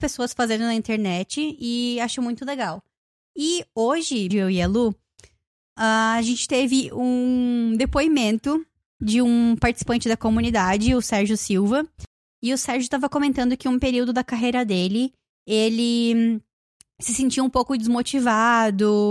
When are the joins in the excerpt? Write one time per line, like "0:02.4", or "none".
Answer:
0:04.3